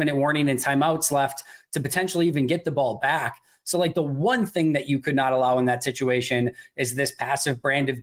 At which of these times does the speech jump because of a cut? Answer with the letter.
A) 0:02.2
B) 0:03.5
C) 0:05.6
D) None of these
D